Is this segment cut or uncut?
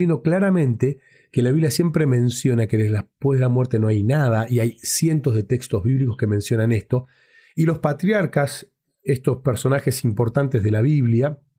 uncut